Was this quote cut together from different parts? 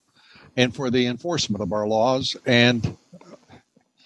no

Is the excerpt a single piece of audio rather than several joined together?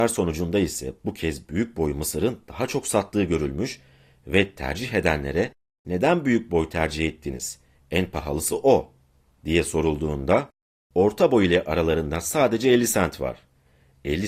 yes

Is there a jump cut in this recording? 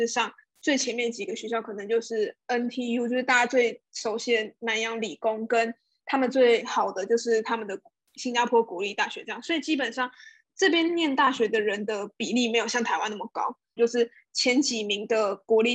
yes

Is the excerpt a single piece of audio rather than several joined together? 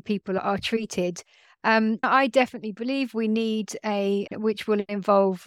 no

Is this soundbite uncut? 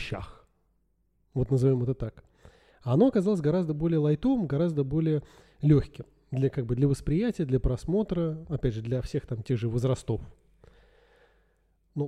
yes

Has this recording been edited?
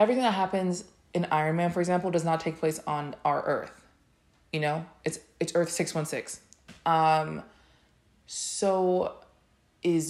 no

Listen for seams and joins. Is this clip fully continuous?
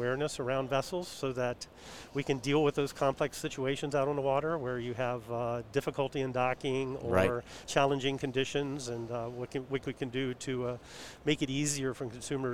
yes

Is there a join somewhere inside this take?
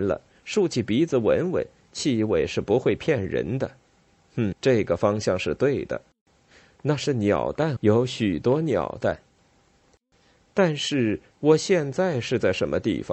yes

